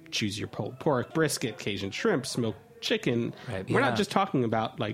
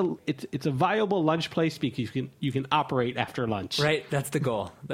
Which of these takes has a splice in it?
first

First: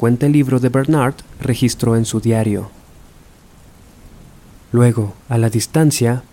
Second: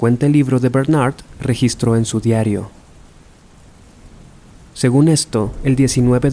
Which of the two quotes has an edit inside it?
first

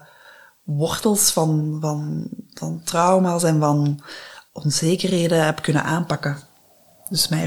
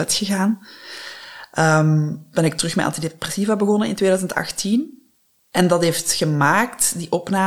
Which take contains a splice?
first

